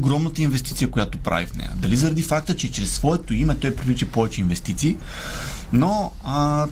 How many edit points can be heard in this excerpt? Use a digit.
0